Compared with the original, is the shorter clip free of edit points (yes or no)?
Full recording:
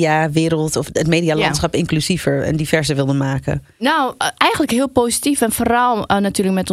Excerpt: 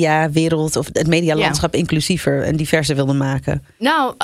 yes